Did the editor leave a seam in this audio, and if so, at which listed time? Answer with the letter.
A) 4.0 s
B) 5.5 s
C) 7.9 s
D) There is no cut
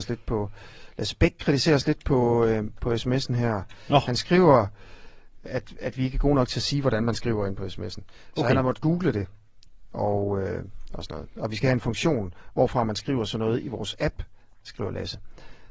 B